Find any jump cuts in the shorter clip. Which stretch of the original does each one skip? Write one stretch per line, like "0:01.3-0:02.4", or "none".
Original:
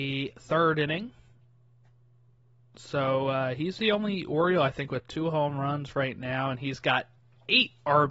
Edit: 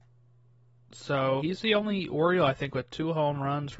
0:03.2-0:03.6